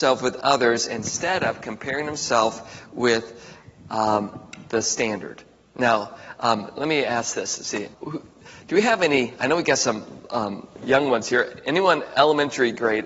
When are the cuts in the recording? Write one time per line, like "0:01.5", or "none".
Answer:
0:07.9